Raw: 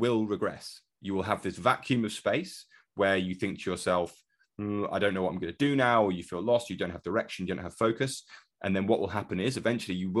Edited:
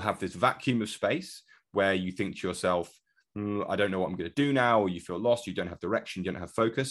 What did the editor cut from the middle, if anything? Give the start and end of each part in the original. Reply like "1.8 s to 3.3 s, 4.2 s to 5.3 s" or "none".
none